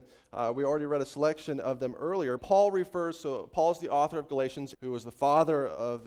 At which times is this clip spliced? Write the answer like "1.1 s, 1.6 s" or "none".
2.4 s, 4.7 s

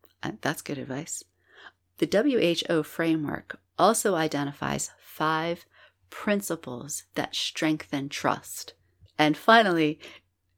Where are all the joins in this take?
1.8 s, 9.1 s

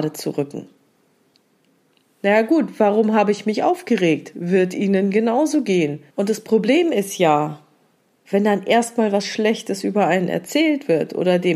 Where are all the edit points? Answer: 6.1 s

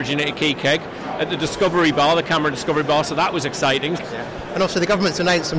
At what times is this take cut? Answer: 4.0 s

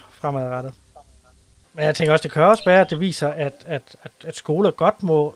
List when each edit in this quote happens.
1.6 s

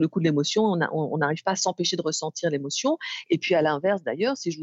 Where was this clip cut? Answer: none

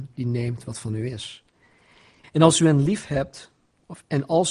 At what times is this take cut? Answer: 2.2 s

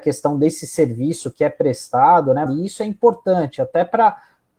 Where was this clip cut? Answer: 2.5 s

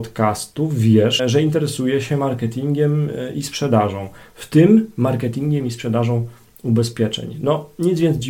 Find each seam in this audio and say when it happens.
1.2 s

